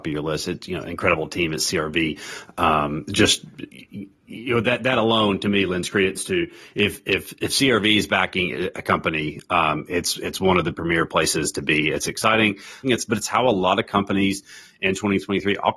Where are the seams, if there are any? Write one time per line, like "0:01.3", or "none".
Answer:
0:12.8